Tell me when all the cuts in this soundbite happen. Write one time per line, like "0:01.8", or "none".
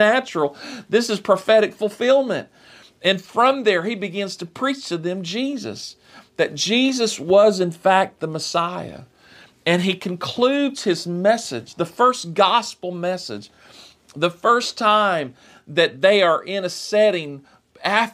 none